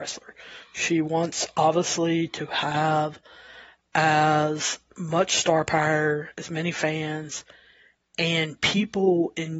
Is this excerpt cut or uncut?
uncut